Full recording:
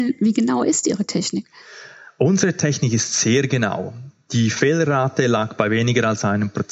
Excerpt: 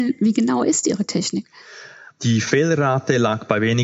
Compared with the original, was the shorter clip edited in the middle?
yes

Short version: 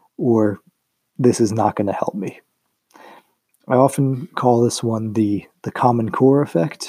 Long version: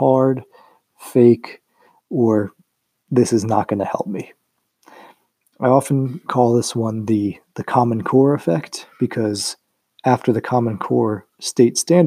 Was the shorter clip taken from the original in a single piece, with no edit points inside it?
yes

